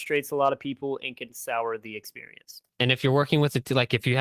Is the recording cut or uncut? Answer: cut